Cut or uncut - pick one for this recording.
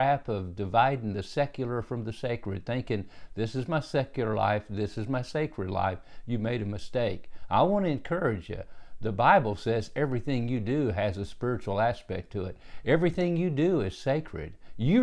uncut